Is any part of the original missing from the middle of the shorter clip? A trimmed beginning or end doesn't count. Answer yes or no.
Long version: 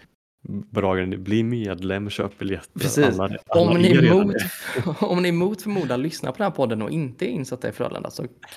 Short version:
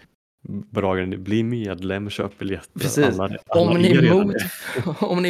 no